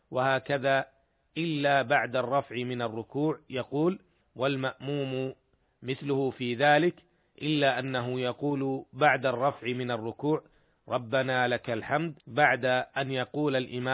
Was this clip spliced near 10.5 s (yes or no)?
no